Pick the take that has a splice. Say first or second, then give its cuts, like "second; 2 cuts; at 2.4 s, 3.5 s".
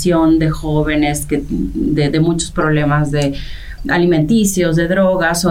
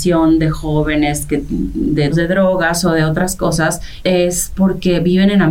second; 2 cuts; at 2.1 s, 4.0 s